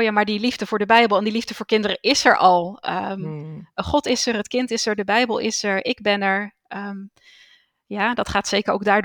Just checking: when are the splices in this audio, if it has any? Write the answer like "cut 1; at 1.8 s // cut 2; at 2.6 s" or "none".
none